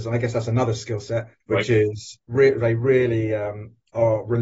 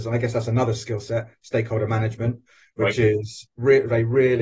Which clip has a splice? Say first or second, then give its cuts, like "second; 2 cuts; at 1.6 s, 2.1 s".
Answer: first; 1 cut; at 1.4 s